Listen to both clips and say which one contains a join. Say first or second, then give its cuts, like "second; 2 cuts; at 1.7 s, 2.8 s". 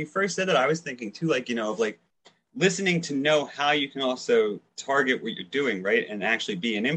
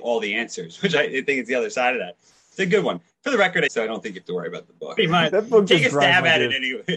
second; 2 cuts; at 3.7 s, 5.0 s